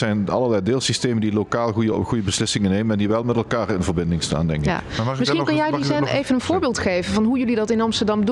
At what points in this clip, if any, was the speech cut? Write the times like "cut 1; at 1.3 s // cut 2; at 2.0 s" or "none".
none